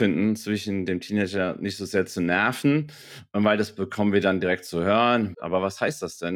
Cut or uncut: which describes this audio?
cut